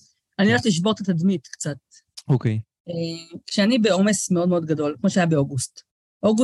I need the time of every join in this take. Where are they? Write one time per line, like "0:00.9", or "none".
none